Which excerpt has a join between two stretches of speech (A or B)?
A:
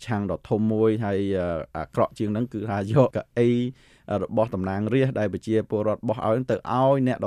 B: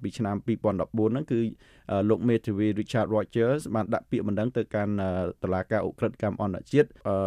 A